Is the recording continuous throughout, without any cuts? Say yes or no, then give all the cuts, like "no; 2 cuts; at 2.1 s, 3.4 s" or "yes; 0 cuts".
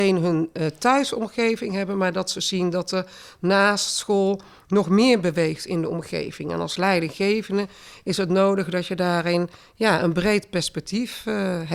yes; 0 cuts